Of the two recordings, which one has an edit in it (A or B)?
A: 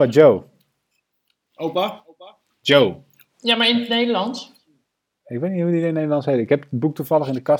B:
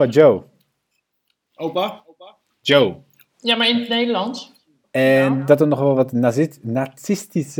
B